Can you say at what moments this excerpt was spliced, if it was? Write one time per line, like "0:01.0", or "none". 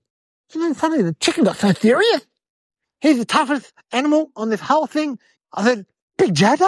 0:02.8
0:05.4